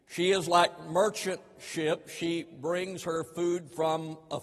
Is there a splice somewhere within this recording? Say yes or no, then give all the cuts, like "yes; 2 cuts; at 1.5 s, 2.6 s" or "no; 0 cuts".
no; 0 cuts